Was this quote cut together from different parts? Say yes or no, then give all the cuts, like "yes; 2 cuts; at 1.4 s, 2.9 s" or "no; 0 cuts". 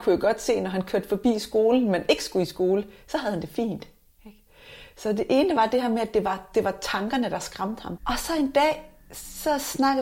yes; 1 cut; at 8.0 s